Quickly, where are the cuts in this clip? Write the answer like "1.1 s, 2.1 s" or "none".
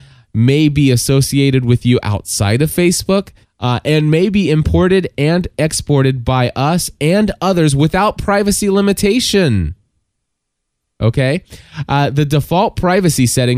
3.4 s

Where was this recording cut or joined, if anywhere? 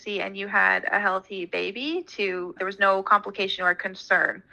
2.6 s

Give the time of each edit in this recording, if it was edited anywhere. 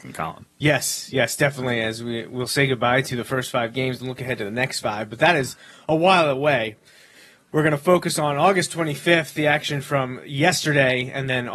none

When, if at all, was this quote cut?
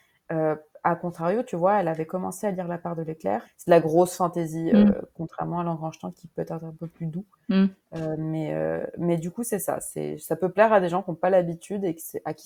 3.4 s

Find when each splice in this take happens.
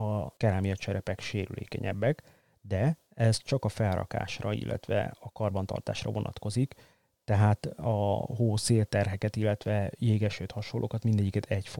none

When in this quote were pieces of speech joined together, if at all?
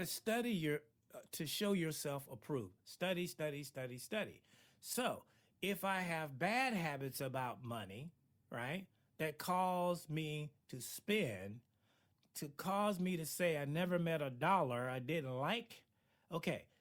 12.2 s

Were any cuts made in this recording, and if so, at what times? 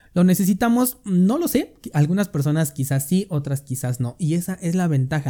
none

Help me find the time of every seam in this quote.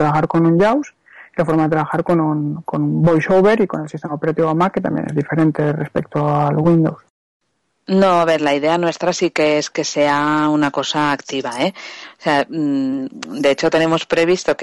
none

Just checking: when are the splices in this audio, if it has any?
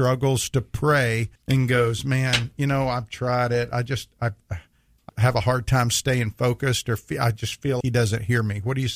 1.4 s, 5.1 s, 7.8 s

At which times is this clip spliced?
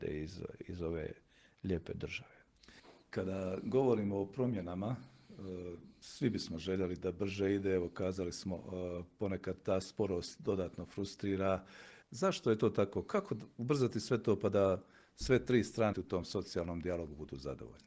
12.0 s, 15.9 s

